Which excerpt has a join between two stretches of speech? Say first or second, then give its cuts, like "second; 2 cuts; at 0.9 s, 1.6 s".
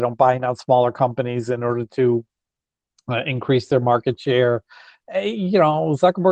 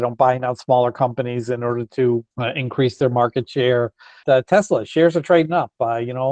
second; 2 cuts; at 2.3 s, 4.2 s